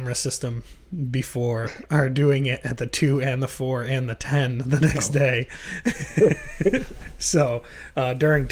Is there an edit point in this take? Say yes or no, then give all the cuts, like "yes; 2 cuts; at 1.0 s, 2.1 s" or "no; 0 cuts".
no; 0 cuts